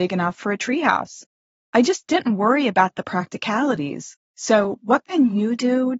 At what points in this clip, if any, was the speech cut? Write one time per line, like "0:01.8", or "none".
0:04.2